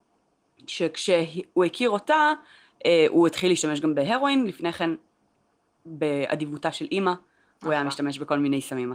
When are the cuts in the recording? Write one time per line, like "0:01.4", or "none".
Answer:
none